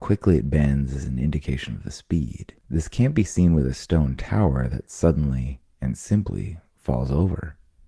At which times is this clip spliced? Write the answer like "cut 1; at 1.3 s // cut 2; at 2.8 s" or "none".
cut 1; at 2.6 s

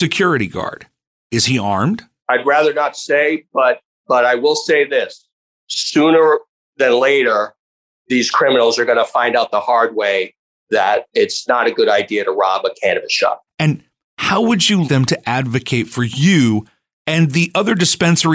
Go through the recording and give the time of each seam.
cut 1; at 13.5 s // cut 2; at 14.8 s

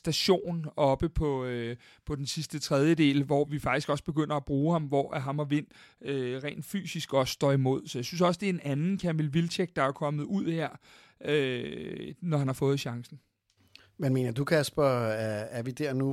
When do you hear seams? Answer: cut 1; at 3.4 s

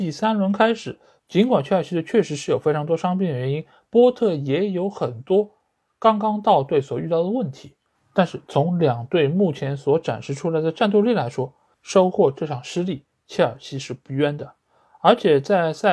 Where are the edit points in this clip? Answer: cut 1; at 1.2 s

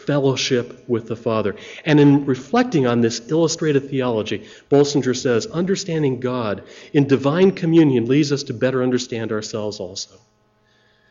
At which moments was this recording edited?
none

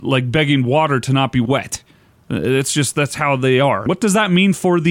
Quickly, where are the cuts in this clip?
cut 1; at 3.9 s

